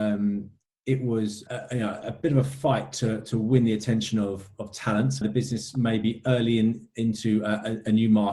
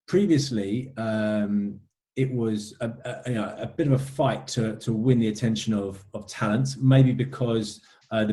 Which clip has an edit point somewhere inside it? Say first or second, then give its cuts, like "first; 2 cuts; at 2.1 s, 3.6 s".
first; 2 cuts; at 1.5 s, 5.2 s